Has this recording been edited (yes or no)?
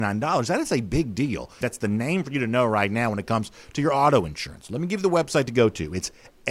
yes